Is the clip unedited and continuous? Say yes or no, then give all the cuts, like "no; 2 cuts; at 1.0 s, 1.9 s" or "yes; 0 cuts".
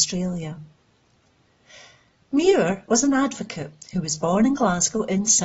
no; 1 cut; at 2.2 s